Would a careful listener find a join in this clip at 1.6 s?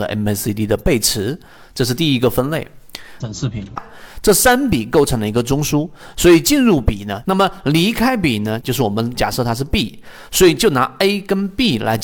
no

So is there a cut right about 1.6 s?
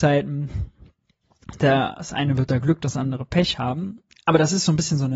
no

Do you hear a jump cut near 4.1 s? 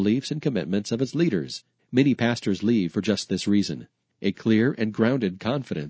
yes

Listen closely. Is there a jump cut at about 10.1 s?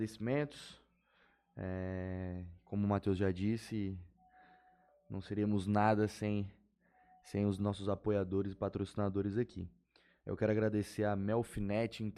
no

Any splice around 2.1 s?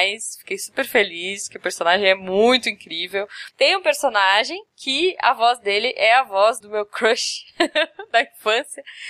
no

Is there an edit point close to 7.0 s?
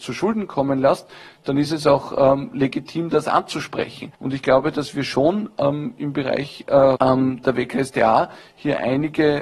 yes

